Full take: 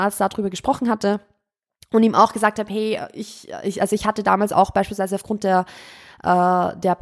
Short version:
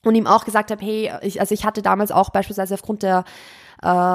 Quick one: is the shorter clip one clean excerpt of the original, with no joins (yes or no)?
no